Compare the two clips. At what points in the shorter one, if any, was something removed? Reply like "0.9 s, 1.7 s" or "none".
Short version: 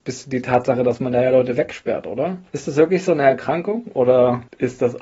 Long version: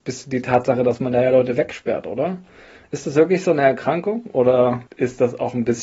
2.5 s